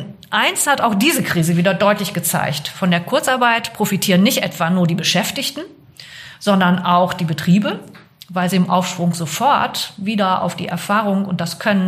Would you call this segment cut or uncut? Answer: uncut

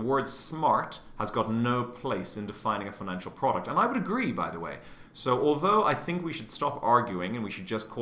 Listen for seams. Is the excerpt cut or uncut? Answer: uncut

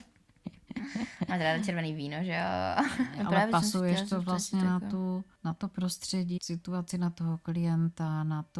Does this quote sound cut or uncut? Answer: cut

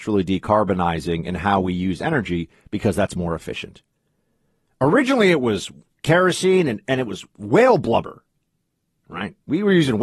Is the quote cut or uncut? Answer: cut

